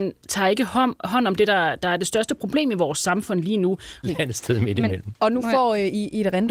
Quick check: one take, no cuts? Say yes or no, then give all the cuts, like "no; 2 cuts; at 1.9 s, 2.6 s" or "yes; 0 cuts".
no; 1 cut; at 4.0 s